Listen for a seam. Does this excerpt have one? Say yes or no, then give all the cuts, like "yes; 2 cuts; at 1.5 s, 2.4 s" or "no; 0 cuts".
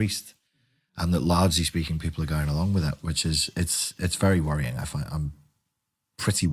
no; 0 cuts